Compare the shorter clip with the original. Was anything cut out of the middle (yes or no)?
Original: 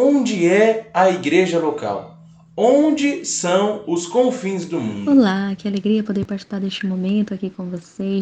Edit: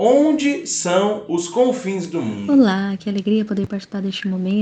no